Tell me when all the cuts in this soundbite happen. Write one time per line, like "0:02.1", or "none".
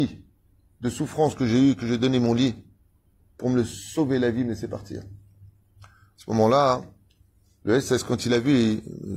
none